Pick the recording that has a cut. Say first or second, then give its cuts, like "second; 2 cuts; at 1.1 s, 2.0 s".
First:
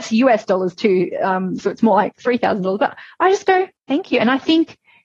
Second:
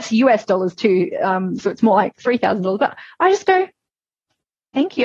first; 1 cut; at 3.8 s